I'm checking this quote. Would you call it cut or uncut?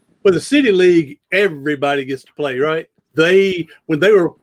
cut